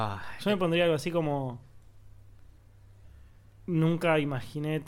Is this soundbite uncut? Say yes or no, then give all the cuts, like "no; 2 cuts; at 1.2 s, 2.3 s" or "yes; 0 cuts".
yes; 0 cuts